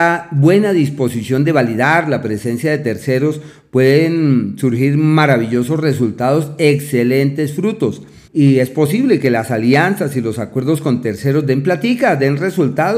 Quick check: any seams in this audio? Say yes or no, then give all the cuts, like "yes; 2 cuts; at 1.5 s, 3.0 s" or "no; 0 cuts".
yes; 1 cut; at 8.3 s